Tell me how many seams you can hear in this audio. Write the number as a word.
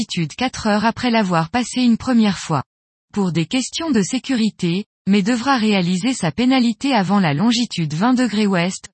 two